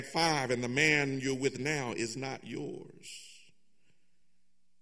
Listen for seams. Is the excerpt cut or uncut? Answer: uncut